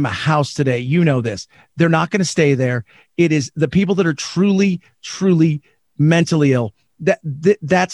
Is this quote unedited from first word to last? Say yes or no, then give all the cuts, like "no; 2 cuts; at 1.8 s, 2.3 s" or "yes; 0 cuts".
yes; 0 cuts